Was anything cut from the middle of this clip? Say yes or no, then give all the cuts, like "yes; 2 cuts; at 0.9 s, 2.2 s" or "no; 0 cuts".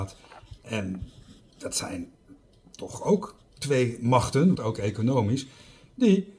yes; 1 cut; at 4.5 s